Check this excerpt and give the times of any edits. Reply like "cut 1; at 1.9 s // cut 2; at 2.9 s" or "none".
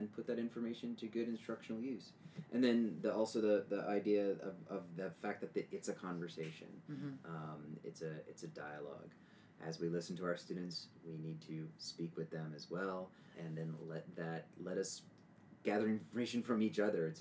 cut 1; at 13.3 s